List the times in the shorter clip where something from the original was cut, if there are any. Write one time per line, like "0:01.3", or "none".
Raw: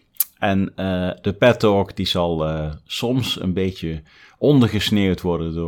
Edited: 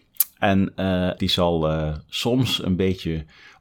0:01.2